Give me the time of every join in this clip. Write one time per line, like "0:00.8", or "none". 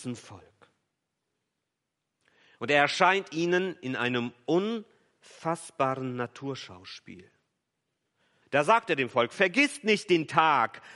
0:08.4

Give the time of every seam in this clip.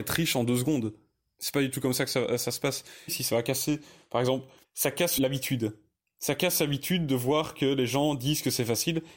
0:03.1
0:04.6

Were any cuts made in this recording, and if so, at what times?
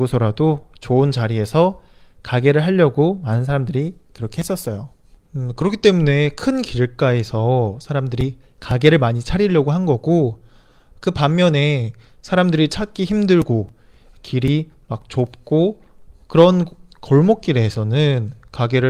0:05.2

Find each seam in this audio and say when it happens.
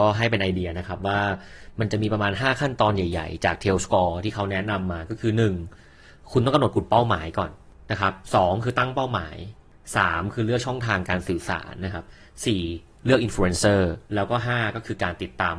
0:14.1

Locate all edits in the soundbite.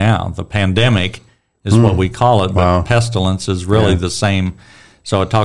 none

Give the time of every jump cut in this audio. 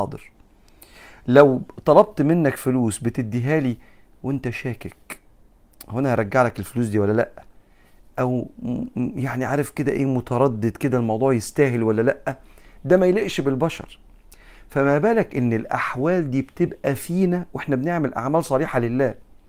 none

